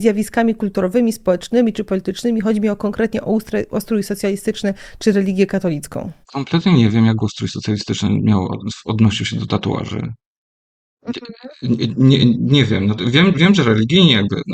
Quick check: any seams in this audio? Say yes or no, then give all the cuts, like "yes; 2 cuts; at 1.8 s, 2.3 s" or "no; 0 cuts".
yes; 1 cut; at 6.2 s